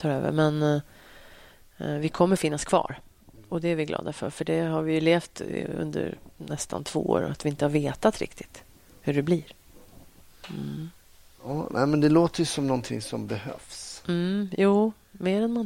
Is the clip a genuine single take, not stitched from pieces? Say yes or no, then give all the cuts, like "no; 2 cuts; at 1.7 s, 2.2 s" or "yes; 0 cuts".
yes; 0 cuts